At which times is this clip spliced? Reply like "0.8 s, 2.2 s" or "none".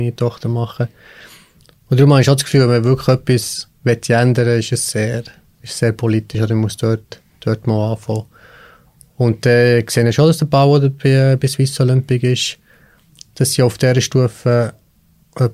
none